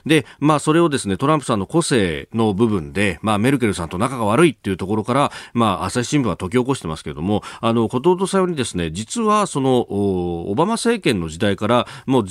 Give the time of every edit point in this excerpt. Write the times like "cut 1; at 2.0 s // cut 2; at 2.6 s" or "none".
none